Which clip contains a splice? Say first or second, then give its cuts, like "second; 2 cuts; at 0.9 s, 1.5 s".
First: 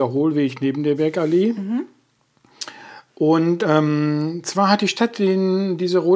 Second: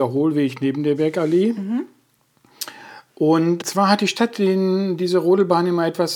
second; 1 cut; at 3.6 s